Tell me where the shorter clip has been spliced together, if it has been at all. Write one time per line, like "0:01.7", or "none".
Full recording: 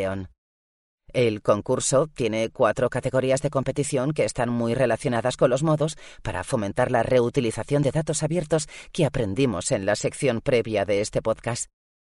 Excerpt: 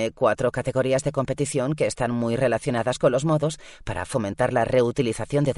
none